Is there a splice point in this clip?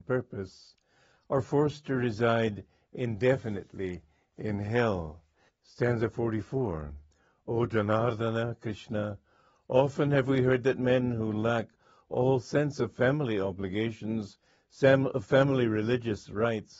yes; 1 cut; at 5.5 s

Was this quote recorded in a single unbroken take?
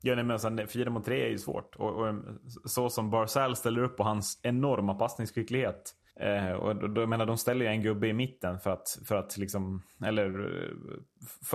no; 1 cut; at 6.1 s

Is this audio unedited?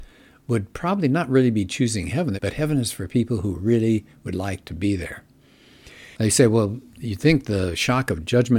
no; 2 cuts; at 2.4 s, 6.1 s

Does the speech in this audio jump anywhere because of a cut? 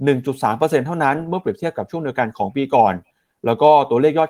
no; 0 cuts

